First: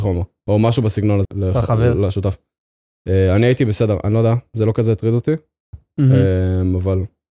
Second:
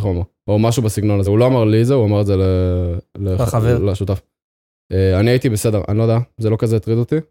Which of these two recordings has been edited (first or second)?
first